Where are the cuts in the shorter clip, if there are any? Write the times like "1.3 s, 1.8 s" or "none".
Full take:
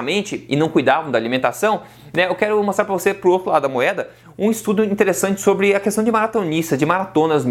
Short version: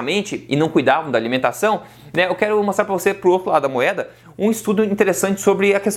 none